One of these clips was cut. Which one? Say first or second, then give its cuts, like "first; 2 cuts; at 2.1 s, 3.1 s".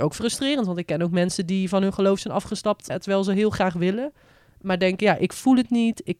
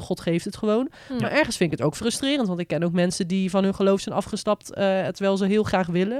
first; 1 cut; at 2.9 s